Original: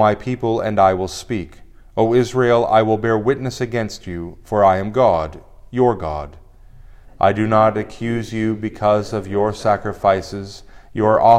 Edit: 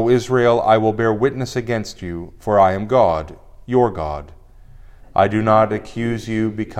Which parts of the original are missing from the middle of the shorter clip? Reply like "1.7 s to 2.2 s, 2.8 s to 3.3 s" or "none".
none